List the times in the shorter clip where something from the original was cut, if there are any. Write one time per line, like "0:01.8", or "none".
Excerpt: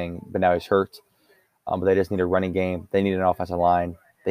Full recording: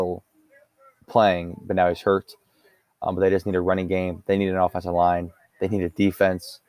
none